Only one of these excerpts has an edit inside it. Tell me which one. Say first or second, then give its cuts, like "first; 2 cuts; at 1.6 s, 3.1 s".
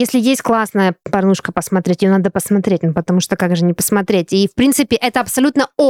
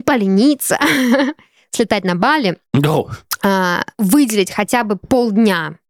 second; 1 cut; at 3.9 s